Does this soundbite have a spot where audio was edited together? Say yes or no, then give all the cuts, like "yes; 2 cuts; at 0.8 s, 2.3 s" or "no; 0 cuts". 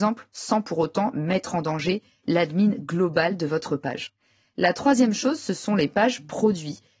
no; 0 cuts